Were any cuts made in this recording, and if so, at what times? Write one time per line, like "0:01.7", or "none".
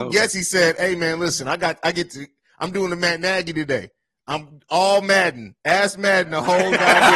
none

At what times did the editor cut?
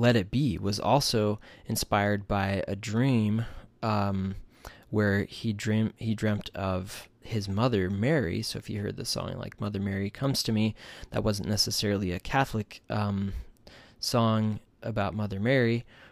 none

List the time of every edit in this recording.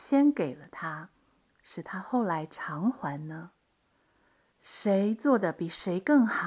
0:04.5

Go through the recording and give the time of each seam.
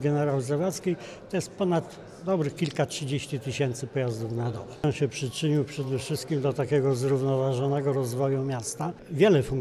none

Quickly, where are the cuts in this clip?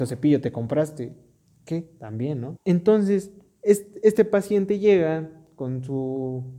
0:02.6

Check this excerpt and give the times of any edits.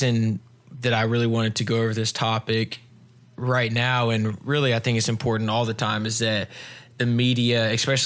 none

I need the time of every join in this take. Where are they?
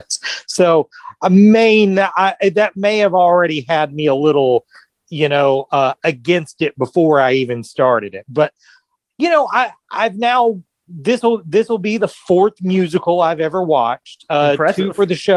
none

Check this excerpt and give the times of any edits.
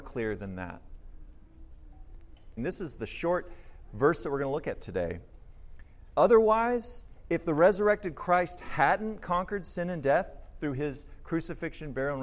0:02.6
0:06.1

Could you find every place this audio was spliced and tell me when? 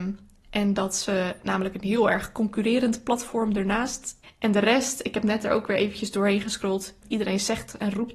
0:04.2
0:07.0

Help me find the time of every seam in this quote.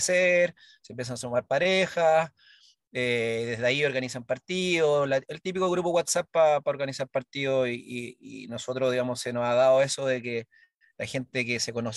none

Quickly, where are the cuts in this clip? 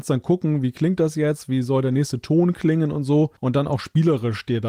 0:03.4

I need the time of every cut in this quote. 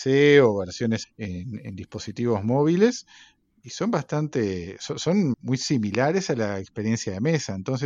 0:01.0
0:05.3

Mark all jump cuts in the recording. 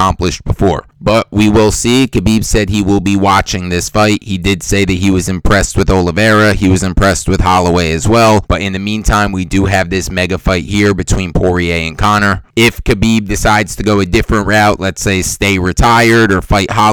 0:08.5
0:14.8

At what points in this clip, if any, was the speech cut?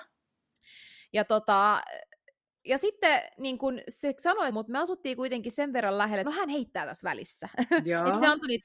0:04.5
0:06.2

